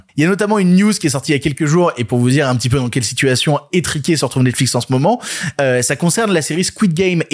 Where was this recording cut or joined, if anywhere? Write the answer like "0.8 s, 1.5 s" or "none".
none

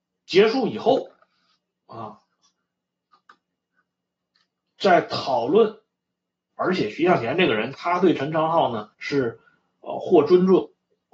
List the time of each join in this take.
6.5 s, 7.7 s, 8.9 s

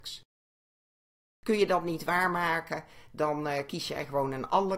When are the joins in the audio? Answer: none

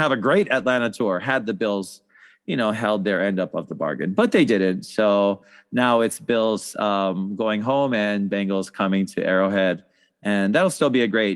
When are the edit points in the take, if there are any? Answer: none

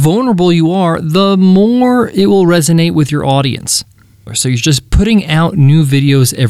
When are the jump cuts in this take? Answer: 4.3 s

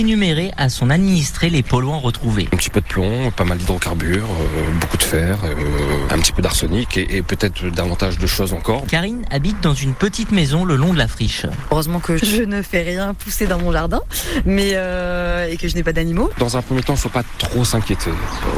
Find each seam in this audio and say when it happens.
12.2 s, 16.3 s

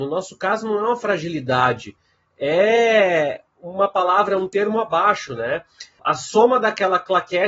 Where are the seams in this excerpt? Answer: 6.0 s

